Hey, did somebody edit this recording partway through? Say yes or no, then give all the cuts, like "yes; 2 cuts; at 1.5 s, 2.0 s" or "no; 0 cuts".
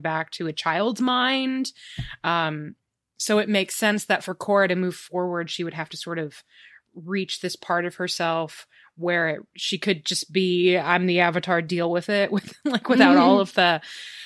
no; 0 cuts